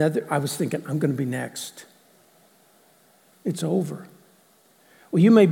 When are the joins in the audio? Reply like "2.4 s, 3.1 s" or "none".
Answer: 3.3 s